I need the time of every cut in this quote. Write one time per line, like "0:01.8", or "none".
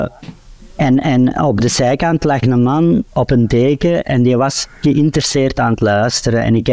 0:02.4